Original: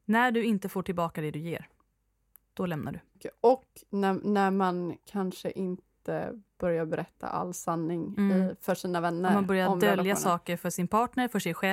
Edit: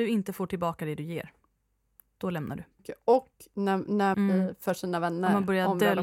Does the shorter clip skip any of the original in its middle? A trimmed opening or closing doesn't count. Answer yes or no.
yes